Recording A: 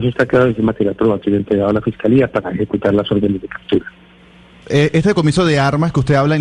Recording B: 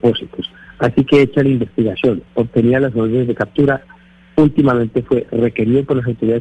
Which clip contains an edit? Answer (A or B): A